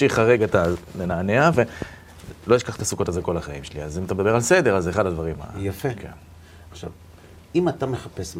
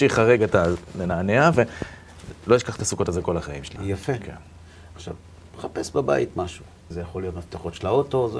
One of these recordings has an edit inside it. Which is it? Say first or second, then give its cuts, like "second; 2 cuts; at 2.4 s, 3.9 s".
second; 3 cuts; at 3.8 s, 5.4 s, 6.9 s